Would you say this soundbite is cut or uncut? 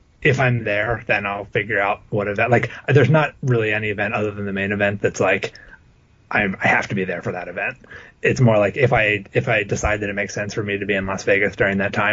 uncut